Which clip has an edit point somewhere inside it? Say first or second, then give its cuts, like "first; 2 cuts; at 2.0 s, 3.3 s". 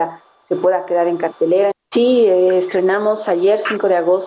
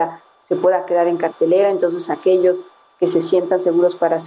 first; 1 cut; at 1.7 s